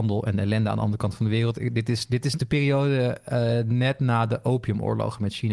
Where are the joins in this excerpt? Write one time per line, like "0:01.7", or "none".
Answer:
none